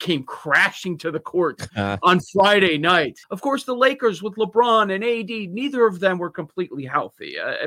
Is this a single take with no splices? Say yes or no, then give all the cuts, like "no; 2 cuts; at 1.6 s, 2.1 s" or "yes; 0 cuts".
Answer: no; 1 cut; at 3.2 s